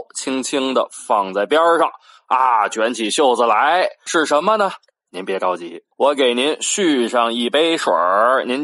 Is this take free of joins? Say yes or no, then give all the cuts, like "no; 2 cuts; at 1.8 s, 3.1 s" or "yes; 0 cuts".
no; 2 cuts; at 4.1 s, 5.9 s